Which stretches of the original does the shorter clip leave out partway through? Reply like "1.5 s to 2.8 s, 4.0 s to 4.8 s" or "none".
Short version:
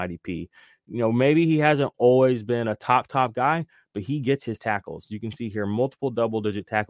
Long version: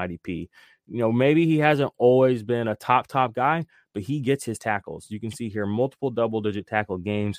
none